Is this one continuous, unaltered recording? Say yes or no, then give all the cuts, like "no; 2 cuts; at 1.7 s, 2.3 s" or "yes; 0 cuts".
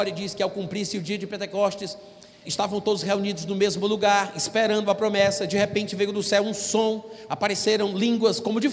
no; 2 cuts; at 2.4 s, 7.3 s